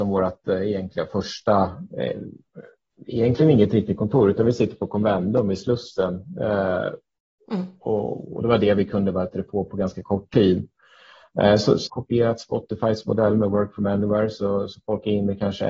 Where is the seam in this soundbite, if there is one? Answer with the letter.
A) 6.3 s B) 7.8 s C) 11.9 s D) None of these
C